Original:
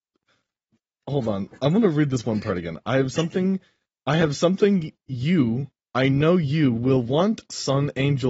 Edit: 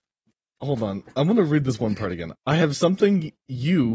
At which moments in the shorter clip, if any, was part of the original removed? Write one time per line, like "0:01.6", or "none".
0:02.4